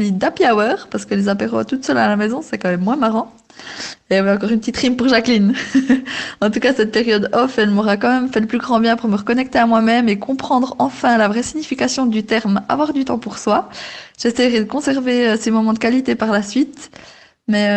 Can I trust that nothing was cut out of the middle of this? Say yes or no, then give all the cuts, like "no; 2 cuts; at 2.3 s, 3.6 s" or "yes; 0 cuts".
yes; 0 cuts